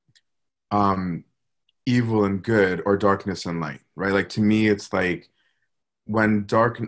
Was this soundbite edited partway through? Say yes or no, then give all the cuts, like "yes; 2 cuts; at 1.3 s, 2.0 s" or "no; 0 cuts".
no; 0 cuts